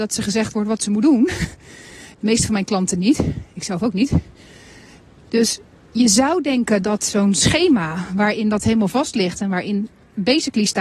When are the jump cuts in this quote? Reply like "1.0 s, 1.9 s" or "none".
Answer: none